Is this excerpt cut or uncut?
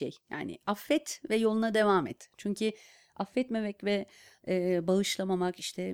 uncut